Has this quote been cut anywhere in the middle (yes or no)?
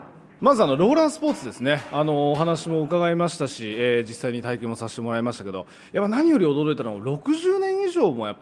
no